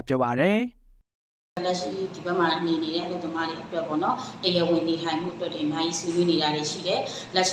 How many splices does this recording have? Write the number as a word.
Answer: zero